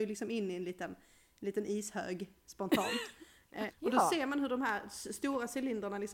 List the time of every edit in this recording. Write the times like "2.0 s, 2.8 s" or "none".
3.7 s